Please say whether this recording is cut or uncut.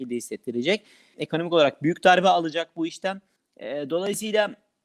cut